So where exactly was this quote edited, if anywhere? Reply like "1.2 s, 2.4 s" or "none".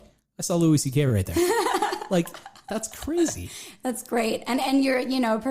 none